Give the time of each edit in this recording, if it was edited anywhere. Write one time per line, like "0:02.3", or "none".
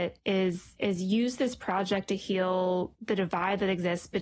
none